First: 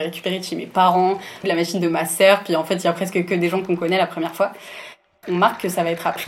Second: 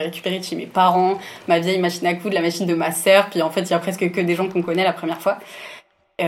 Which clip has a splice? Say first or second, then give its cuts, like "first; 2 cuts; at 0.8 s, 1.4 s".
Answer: first; 2 cuts; at 1.4 s, 5.2 s